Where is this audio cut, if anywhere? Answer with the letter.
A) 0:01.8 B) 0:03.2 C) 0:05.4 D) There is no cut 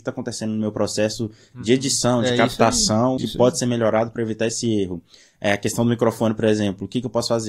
B